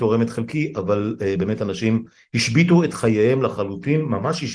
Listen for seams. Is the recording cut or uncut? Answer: uncut